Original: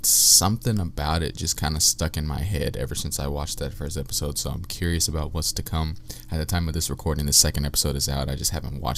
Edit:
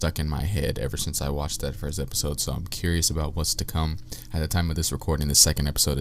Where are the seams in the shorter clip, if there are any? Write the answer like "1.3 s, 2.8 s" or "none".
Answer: none